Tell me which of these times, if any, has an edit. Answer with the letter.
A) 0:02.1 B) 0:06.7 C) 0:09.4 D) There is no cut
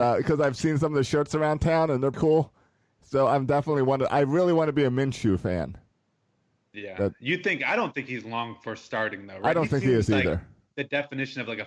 A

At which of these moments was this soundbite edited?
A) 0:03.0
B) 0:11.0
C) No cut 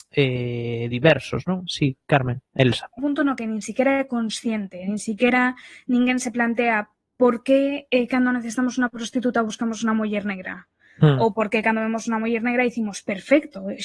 A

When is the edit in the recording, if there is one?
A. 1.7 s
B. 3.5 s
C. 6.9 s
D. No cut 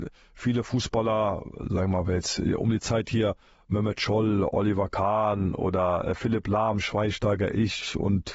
D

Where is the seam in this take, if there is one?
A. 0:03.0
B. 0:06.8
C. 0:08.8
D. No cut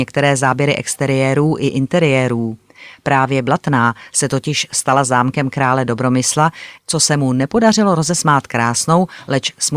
B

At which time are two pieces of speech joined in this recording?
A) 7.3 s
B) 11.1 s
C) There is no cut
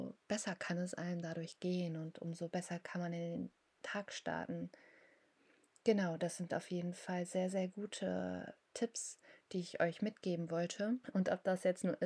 B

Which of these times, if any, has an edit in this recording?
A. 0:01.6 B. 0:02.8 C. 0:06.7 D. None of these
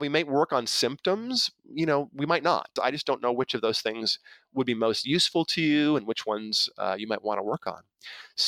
B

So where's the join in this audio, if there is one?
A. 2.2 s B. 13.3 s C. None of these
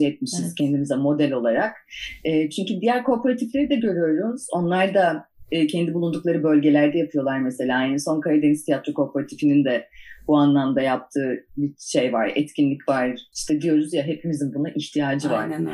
B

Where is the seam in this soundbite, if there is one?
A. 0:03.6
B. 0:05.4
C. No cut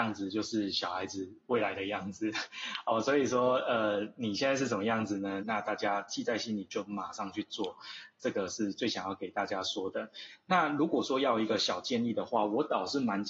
B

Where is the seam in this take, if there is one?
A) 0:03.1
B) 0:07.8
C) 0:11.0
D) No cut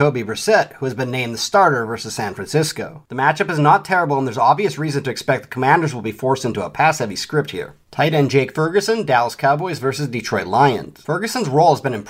B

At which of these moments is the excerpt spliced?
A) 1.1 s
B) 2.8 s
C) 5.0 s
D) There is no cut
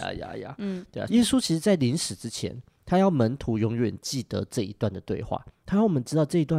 A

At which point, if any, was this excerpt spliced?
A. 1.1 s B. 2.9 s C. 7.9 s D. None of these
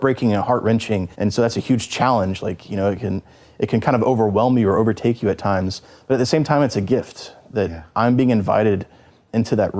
A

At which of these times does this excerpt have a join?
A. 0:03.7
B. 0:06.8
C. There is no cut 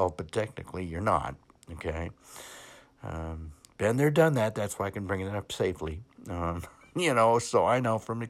C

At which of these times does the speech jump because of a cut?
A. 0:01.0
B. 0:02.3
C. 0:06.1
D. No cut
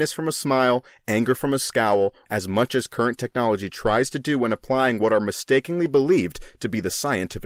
B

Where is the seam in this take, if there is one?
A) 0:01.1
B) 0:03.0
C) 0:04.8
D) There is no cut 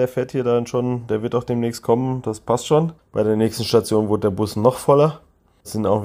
B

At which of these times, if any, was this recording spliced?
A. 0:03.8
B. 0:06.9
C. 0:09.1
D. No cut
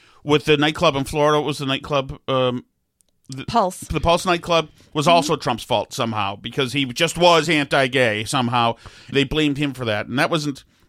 C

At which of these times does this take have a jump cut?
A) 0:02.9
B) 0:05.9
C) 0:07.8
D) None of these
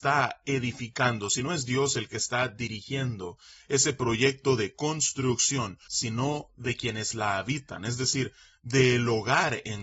B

